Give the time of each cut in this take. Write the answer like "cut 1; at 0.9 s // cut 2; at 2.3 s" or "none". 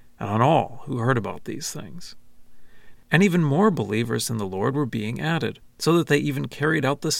cut 1; at 3.0 s // cut 2; at 5.6 s

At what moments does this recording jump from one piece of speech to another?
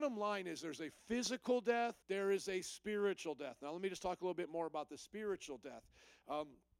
cut 1; at 2.0 s

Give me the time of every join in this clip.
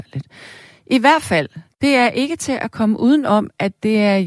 cut 1; at 1.7 s

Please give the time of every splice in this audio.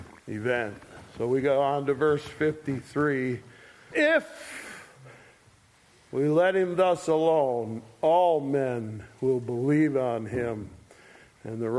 cut 1; at 3.9 s

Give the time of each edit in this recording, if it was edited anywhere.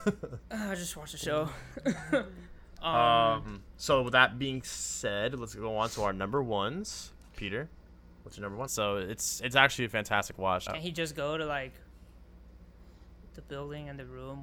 cut 1; at 8.7 s // cut 2; at 10.7 s

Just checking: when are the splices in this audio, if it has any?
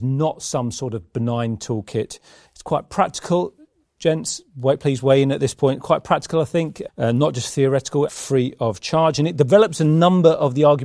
cut 1; at 2.5 s // cut 2; at 6.9 s // cut 3; at 8.1 s

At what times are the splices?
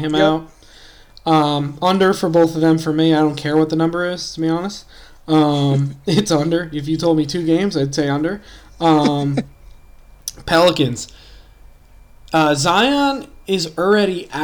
none

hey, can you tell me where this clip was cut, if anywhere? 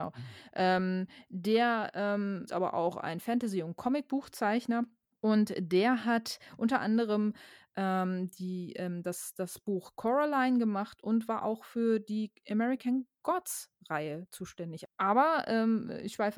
cut 1; at 2.5 s

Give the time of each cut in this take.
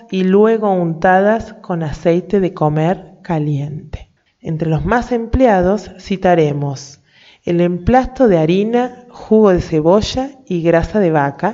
cut 1; at 4.3 s

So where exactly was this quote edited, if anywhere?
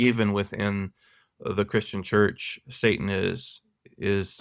none

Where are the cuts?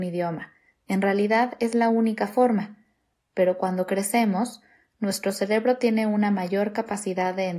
cut 1; at 3.2 s

